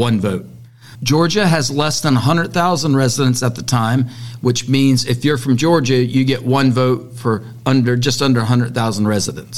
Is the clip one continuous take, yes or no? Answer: no